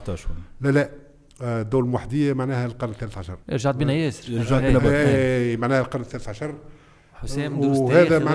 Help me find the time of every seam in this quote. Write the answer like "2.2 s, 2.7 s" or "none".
3.4 s